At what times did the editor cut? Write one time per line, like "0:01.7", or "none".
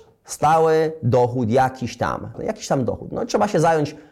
0:02.3

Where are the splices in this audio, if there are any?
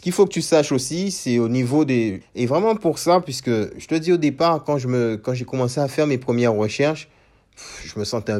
0:02.2

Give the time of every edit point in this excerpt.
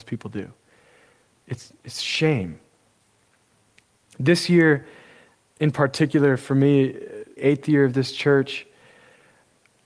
0:01.4
0:07.4

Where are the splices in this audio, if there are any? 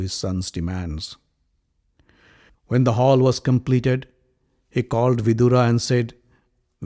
0:02.5

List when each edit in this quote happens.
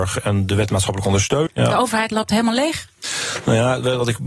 0:01.5

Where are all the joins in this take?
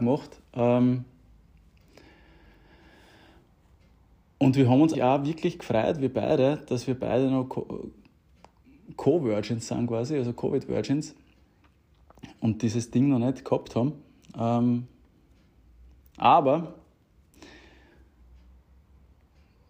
0:04.9

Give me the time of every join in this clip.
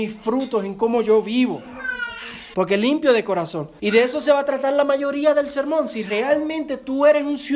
0:02.5
0:03.8

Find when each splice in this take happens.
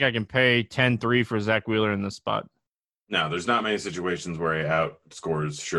none

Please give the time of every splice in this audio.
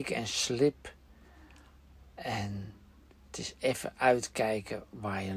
none

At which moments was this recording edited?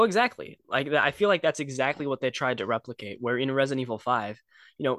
none

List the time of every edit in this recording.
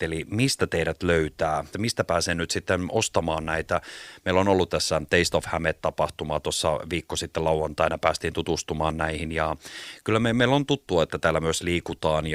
0:01.7

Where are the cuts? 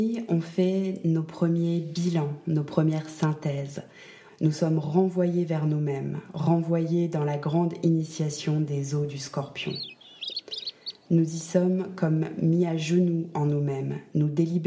0:04.3

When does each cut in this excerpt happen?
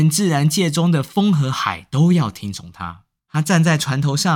0:03.2

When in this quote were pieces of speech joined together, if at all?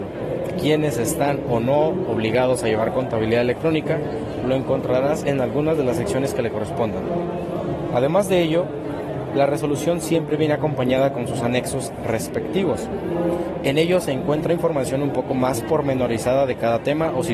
none

